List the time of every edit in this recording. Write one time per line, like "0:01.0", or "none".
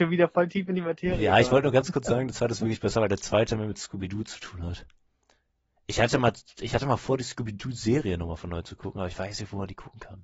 none